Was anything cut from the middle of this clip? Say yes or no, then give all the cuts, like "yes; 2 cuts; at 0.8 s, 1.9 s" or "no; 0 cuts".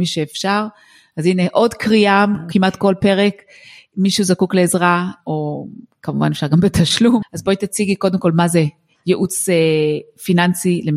yes; 2 cuts; at 5.2 s, 7.2 s